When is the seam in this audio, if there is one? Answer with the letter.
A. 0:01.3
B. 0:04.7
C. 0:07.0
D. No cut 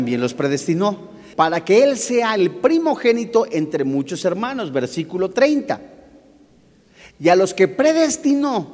A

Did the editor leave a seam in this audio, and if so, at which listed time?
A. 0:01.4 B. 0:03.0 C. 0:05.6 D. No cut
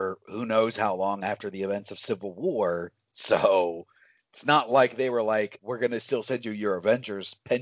C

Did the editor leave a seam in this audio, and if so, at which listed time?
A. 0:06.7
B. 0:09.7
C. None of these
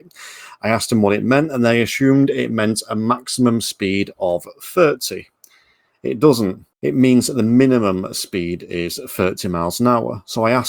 A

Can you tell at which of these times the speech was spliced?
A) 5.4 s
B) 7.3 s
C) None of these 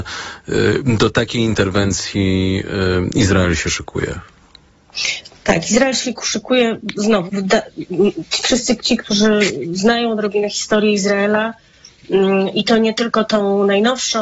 B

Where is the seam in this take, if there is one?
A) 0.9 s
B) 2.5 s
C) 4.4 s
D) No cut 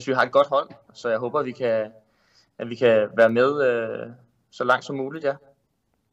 A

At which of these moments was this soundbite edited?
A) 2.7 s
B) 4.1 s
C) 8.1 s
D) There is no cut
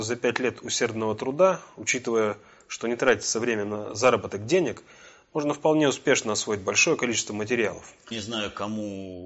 C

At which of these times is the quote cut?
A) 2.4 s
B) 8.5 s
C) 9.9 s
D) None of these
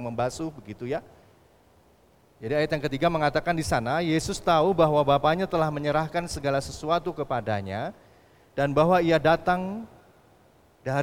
A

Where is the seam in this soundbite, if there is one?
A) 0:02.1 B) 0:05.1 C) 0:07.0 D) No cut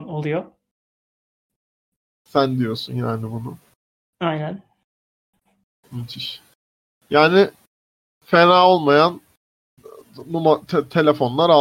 D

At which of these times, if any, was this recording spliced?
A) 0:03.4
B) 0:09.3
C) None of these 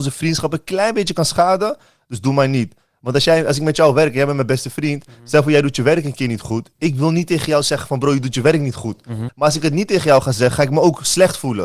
B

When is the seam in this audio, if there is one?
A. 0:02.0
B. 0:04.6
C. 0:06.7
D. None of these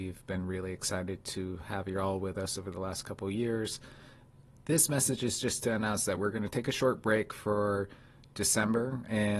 D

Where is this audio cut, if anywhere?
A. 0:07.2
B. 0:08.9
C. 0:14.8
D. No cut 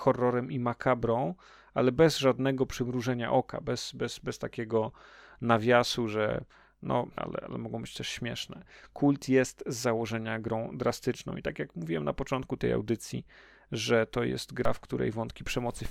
A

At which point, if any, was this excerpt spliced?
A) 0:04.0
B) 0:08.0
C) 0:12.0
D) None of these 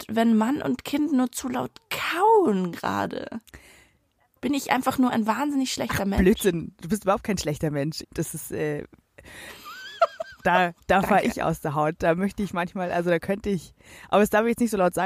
B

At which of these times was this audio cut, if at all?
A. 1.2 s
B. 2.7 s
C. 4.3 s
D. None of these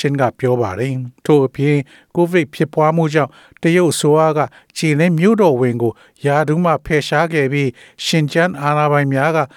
A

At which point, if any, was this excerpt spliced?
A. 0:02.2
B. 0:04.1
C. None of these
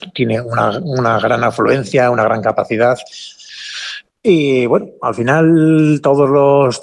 B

